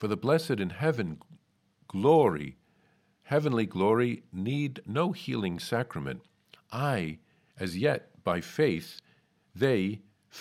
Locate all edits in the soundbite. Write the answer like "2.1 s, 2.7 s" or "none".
6.5 s